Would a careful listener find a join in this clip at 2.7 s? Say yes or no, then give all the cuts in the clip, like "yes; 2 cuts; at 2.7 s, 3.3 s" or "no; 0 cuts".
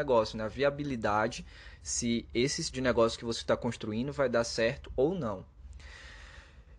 yes; 1 cut; at 2.7 s